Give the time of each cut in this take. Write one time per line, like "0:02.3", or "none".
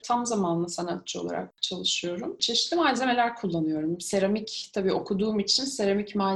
none